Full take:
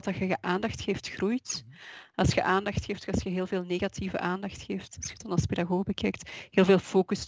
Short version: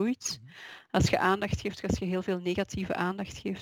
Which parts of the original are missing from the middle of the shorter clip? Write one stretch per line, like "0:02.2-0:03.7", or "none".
none